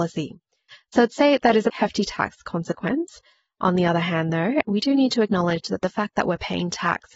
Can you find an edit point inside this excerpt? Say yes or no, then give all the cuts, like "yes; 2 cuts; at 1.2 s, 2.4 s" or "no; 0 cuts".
yes; 2 cuts; at 1.7 s, 4.6 s